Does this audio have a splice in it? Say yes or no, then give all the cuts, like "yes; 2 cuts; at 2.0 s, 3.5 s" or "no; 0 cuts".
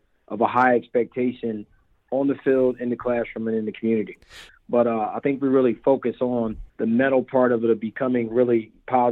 yes; 2 cuts; at 4.5 s, 6.7 s